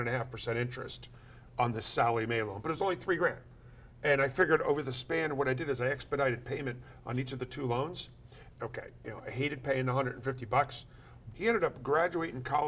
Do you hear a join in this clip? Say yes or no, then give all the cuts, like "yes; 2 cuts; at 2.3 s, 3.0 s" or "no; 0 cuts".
yes; 2 cuts; at 8.6 s, 11.3 s